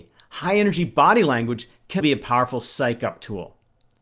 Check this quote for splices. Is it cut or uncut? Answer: cut